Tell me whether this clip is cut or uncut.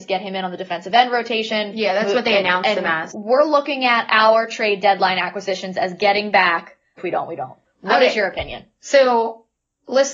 cut